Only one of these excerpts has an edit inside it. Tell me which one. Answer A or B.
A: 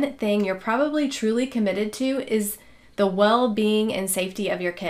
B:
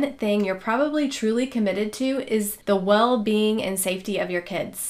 B